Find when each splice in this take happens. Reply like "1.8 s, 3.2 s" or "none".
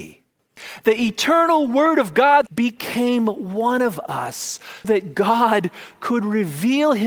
2.5 s, 4.8 s